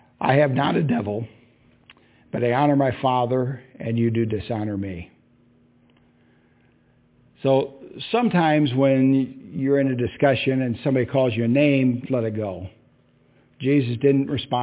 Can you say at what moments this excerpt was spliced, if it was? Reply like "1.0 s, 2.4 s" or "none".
12.0 s